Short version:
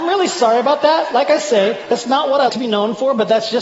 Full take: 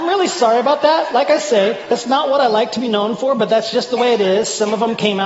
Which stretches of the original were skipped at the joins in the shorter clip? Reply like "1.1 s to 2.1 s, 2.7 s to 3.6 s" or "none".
2.5 s to 2.7 s